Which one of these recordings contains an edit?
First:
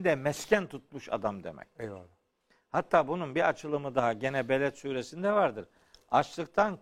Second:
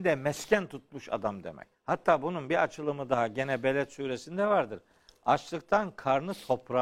second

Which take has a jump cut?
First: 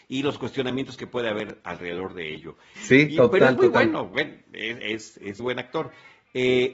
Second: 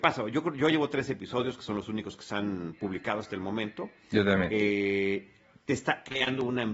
first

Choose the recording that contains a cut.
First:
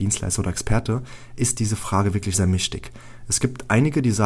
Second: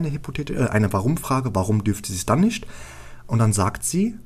first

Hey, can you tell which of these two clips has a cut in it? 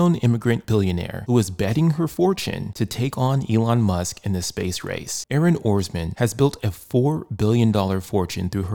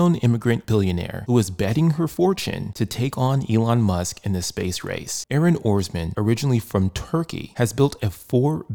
first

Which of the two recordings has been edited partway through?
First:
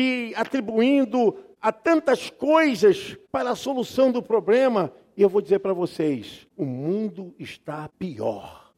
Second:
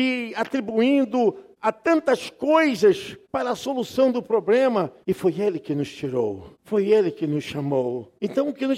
second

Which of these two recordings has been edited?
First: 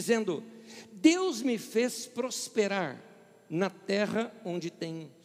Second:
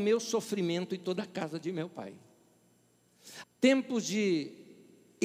second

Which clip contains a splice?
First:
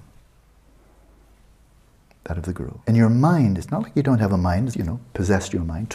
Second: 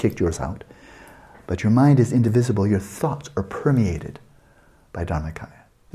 first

